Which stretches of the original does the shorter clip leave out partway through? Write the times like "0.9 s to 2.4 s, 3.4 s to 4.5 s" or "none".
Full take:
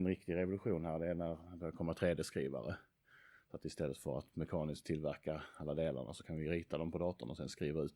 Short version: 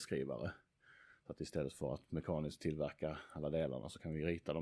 none